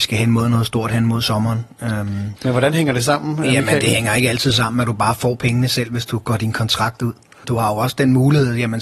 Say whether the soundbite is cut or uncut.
cut